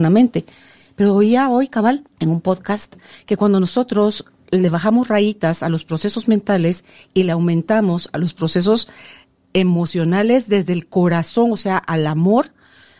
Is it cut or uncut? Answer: cut